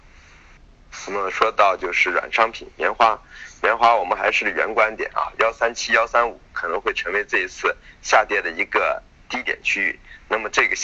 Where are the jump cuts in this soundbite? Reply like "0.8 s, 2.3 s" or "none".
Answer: none